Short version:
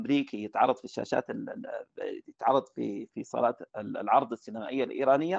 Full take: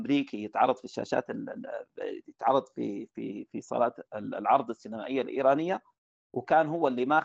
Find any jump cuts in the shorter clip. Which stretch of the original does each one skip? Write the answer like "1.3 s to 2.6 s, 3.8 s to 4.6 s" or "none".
3.1 s to 3.5 s